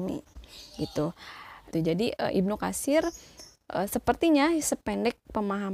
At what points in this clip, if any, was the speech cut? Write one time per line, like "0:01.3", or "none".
0:01.7